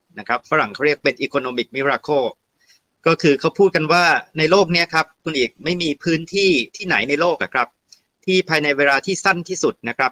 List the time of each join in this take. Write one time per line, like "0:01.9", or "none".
0:06.7